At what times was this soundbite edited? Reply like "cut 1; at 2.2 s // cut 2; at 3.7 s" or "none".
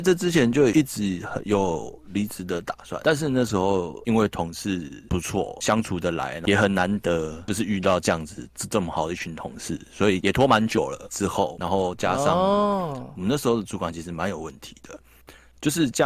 cut 1; at 11.1 s